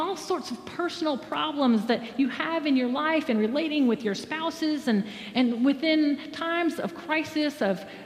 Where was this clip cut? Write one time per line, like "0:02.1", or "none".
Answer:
none